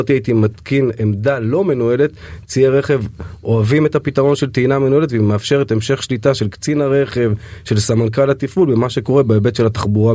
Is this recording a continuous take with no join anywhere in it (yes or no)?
yes